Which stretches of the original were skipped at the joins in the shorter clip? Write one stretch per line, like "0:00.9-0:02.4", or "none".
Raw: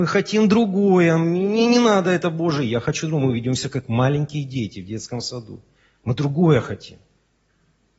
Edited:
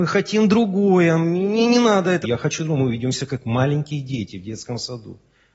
0:02.2-0:02.7